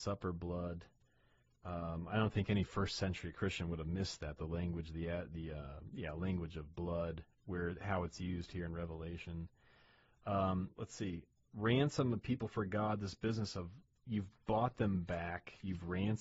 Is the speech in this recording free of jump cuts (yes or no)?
no